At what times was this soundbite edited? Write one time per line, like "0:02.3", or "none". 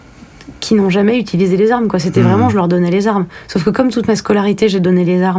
none